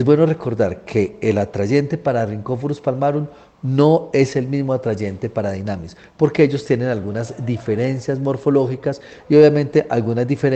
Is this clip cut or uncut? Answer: uncut